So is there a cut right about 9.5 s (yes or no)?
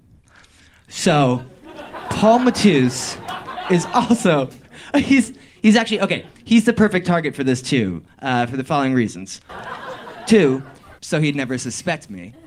yes